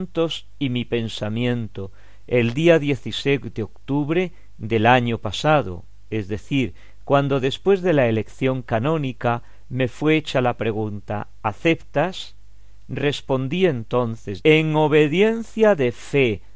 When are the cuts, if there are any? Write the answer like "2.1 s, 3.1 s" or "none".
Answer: 7.0 s, 14.4 s